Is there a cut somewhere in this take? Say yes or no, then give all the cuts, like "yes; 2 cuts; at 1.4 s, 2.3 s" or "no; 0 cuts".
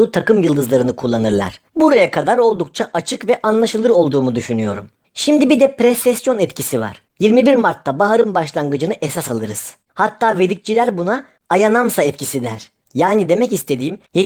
yes; 3 cuts; at 7.1 s, 9.9 s, 12.8 s